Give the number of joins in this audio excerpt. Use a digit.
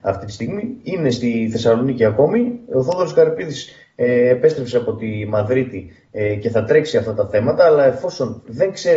0